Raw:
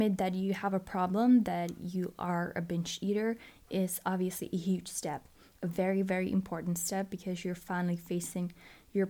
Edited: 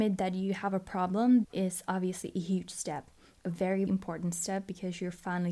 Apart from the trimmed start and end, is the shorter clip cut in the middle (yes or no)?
yes